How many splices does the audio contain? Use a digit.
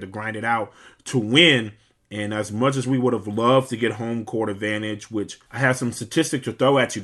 2